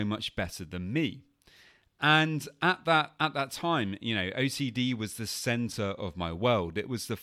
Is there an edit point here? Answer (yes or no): no